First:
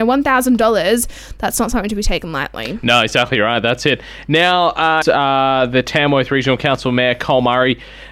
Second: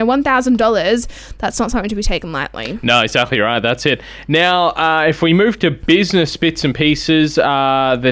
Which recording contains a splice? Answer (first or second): first